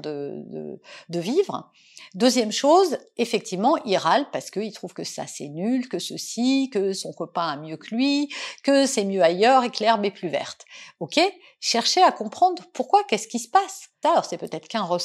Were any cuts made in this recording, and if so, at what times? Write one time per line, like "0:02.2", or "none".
0:14.0